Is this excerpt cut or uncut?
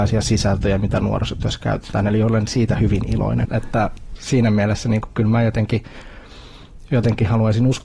cut